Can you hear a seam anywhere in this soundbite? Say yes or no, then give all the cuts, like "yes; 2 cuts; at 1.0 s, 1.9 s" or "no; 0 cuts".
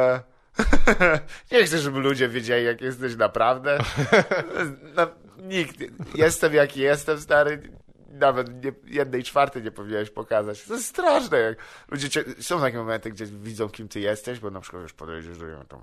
no; 0 cuts